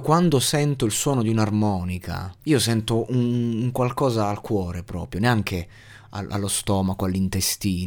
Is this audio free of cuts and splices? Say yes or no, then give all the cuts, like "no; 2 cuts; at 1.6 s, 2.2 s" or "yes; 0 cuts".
no; 1 cut; at 2.4 s